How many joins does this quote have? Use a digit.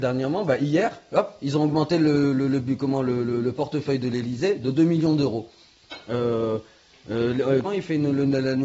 1